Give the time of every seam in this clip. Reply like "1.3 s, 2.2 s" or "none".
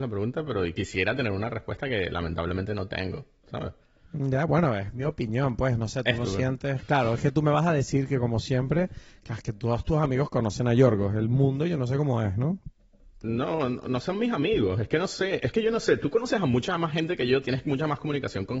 none